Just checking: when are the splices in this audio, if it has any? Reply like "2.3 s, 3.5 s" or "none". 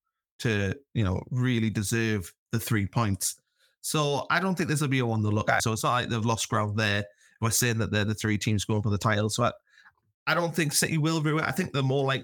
5.6 s